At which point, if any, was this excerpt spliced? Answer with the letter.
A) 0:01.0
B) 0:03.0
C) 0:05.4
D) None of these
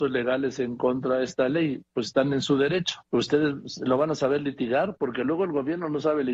B